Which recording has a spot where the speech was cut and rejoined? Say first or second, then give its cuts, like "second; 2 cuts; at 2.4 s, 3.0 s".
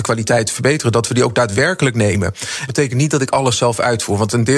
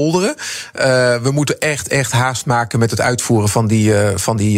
first; 1 cut; at 2.7 s